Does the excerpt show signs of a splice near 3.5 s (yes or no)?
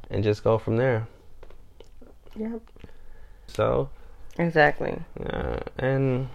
yes